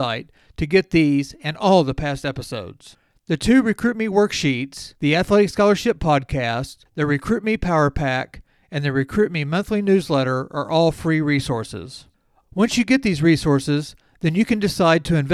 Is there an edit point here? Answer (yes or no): yes